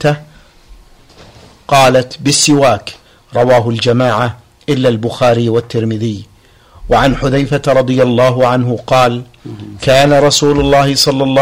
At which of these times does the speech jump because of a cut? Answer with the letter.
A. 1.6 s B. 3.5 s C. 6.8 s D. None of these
D